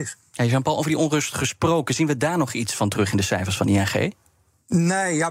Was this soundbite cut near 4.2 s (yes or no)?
no